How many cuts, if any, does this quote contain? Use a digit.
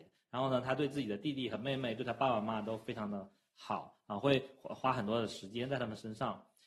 0